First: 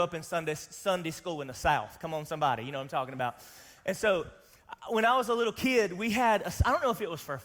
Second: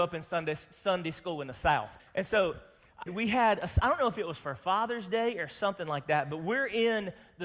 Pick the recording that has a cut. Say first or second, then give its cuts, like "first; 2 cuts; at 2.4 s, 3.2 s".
second; 2 cuts; at 2.0 s, 3.1 s